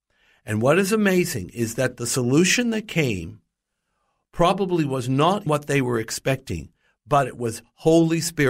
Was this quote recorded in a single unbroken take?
no; 1 cut; at 5.5 s

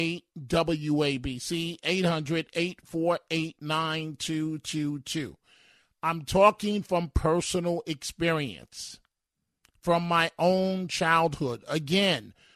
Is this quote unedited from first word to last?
yes; 0 cuts

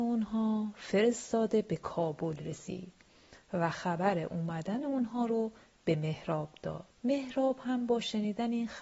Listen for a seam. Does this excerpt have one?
yes; 1 cut; at 7.0 s

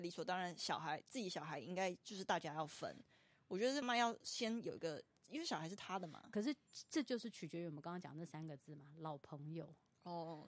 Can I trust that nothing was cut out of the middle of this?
no; 1 cut; at 3.8 s

